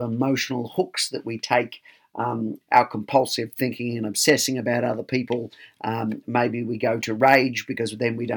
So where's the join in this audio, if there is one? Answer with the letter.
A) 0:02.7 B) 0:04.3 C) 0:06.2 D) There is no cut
A